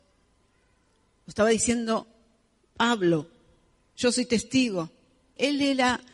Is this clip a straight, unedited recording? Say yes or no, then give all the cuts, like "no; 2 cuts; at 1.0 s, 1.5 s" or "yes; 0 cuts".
no; 1 cut; at 3.9 s